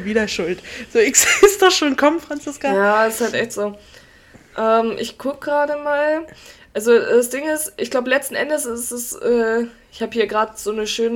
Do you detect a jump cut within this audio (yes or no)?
no